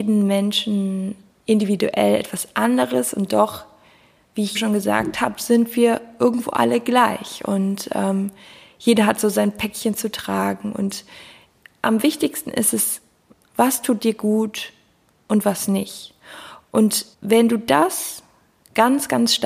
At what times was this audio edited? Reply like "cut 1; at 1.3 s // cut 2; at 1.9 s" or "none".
cut 1; at 4.5 s // cut 2; at 13.5 s // cut 3; at 17.1 s